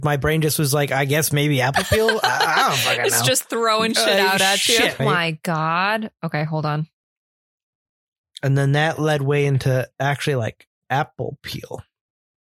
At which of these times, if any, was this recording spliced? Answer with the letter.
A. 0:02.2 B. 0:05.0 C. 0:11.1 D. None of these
B